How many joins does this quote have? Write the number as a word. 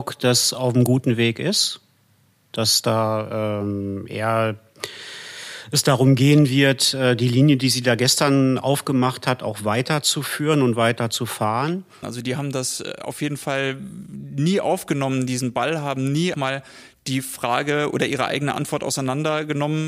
two